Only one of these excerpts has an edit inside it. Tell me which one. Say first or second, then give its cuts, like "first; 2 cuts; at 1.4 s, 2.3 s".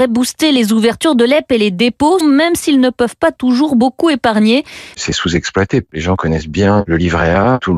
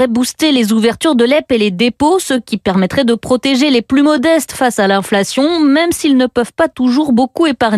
first; 2 cuts; at 2.2 s, 4.9 s